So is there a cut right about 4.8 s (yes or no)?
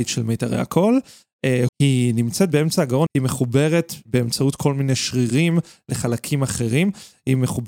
no